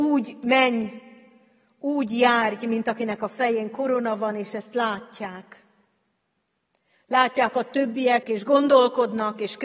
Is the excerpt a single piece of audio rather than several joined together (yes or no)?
no